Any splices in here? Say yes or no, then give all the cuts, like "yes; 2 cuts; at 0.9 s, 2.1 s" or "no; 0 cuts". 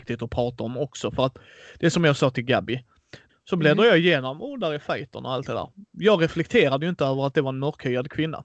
yes; 1 cut; at 3.3 s